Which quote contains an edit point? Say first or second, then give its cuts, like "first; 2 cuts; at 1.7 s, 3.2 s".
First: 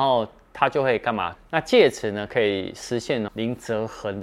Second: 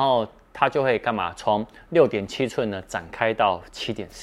first; 2 cuts; at 1.3 s, 3.3 s